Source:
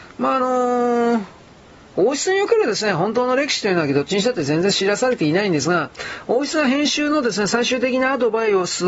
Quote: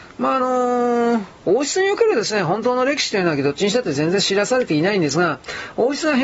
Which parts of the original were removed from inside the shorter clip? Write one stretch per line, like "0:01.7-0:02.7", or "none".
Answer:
0:01.4-0:01.9